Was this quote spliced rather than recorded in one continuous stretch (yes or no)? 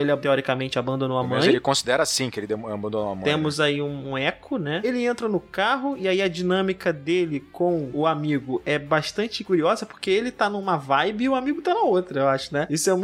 no